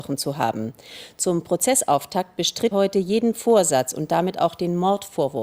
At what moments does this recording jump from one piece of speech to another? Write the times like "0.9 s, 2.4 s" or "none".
2.7 s